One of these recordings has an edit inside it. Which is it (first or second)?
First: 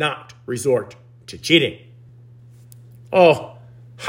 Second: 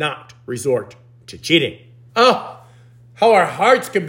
second